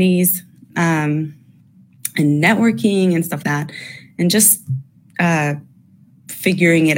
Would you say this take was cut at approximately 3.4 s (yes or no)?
yes